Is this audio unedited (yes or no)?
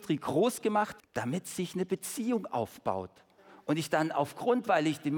no